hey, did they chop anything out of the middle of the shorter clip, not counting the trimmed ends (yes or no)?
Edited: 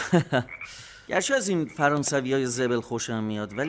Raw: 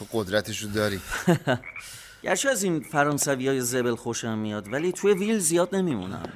no